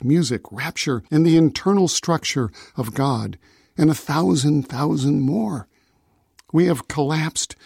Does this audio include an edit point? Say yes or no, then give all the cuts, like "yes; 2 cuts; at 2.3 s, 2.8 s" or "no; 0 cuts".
yes; 1 cut; at 1.1 s